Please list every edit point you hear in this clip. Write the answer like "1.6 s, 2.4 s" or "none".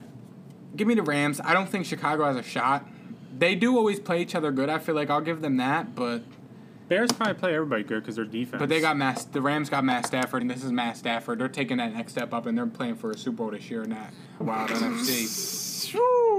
10.4 s, 14.4 s